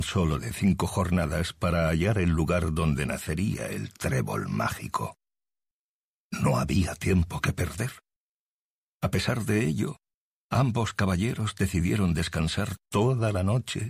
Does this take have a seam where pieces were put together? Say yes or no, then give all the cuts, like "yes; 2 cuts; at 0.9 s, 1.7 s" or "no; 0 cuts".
no; 0 cuts